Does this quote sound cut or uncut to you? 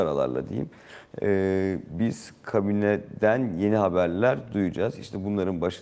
uncut